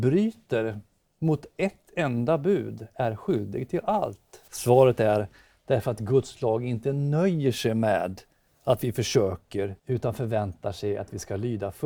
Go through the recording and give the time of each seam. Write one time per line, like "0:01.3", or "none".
0:04.5
0:09.8